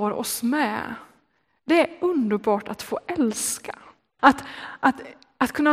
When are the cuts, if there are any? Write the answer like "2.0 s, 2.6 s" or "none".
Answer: 4.2 s